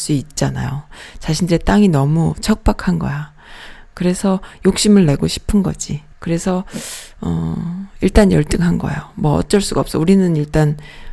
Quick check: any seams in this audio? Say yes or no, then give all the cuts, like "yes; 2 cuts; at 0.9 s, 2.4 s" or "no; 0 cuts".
yes; 1 cut; at 6.1 s